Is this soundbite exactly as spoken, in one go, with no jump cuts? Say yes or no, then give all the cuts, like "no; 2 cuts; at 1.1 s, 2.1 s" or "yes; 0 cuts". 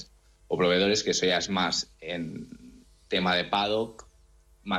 yes; 0 cuts